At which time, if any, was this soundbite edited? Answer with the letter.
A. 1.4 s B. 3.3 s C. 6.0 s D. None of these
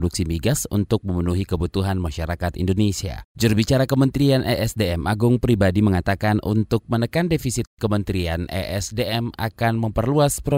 D